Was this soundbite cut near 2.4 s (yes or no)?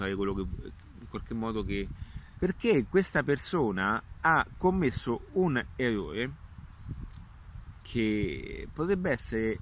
yes